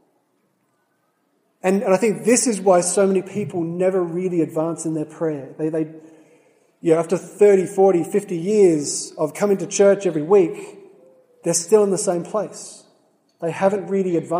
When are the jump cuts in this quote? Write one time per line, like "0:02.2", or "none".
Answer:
none